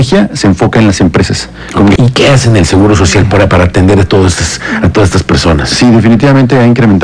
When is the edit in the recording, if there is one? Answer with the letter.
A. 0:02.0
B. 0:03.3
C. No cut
A